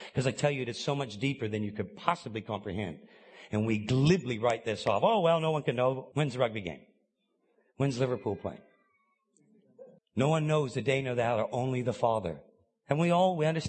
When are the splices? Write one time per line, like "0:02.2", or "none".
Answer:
0:06.1
0:10.0

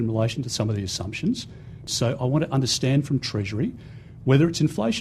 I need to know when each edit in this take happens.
0:01.9

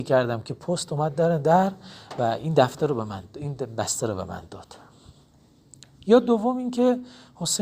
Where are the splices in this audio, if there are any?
none

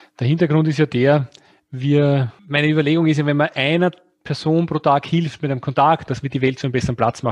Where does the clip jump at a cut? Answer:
0:02.4
0:06.1

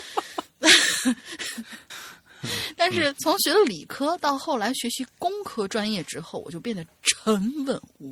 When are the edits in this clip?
0:01.9

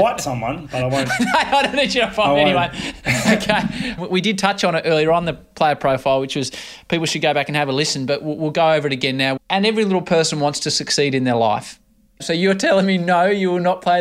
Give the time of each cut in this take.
0:04.0
0:09.4
0:12.2

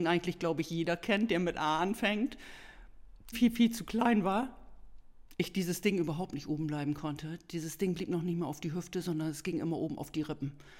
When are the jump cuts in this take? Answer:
0:03.3

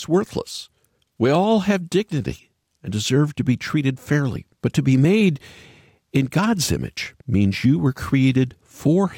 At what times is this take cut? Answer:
0:04.5
0:07.2

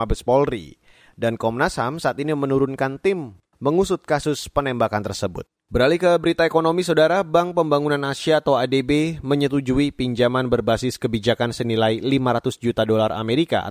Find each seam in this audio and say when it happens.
0:05.6

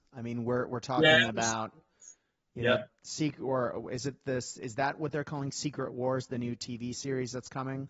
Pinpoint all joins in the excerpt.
none

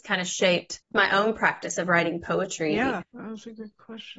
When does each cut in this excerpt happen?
0:03.0

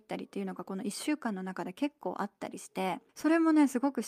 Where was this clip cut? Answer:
0:03.1

